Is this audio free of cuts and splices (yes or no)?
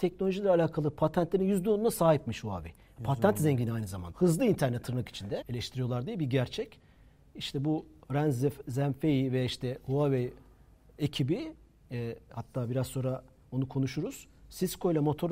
no